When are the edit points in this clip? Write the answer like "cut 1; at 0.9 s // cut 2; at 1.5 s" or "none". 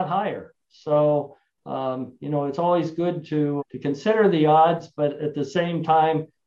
cut 1; at 3.6 s